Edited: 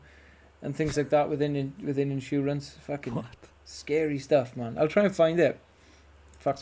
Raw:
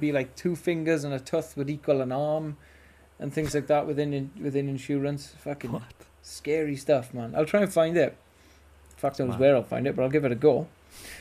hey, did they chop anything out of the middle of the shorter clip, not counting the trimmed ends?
no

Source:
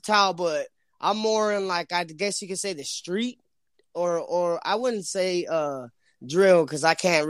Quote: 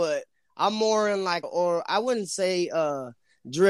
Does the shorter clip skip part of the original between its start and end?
yes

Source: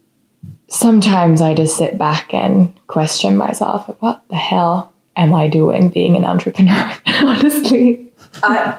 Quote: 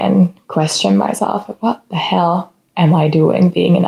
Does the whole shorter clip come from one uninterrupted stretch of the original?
yes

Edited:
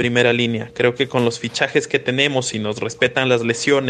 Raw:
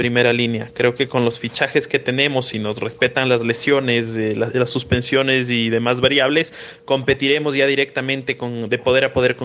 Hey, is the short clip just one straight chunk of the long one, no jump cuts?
yes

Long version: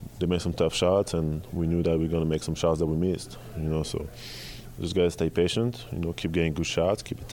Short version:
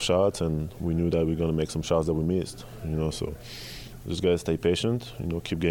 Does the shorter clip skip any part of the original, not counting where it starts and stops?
no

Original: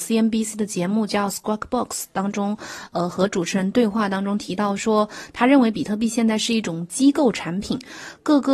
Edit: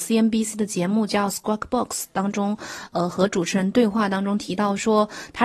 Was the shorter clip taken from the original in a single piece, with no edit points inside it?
yes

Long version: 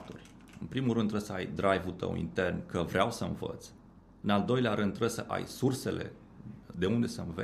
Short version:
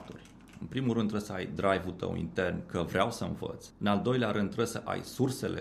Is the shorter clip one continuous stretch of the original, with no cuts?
no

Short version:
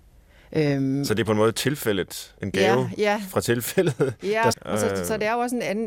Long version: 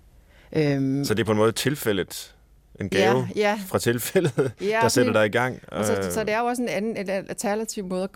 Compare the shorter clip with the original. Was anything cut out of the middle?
yes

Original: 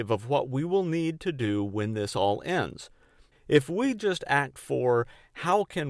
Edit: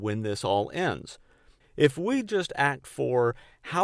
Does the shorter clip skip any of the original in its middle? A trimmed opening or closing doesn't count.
no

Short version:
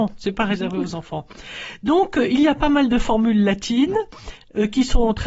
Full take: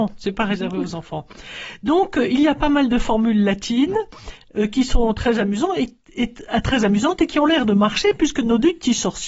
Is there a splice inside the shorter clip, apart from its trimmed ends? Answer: no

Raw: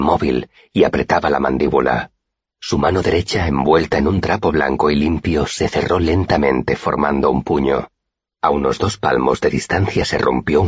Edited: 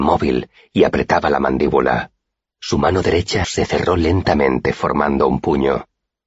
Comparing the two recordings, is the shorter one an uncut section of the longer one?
no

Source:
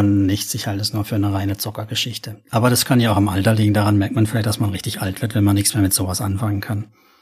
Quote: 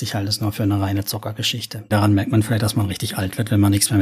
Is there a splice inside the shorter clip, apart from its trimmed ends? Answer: yes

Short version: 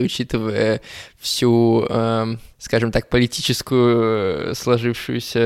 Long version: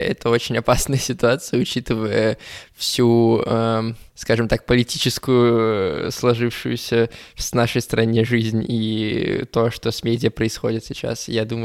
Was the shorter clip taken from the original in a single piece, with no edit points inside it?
yes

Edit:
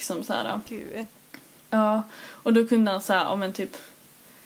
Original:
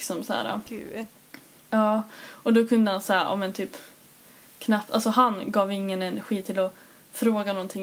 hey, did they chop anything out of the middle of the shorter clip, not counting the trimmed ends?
no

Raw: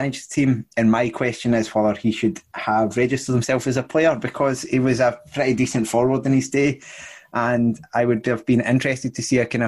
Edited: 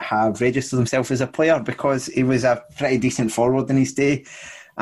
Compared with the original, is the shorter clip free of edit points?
yes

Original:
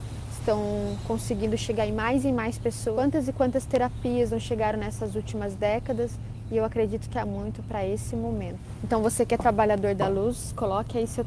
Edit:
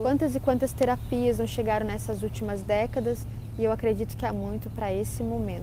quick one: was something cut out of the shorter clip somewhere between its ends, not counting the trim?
no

